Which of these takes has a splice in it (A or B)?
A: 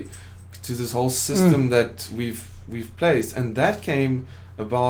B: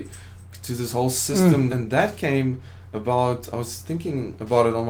B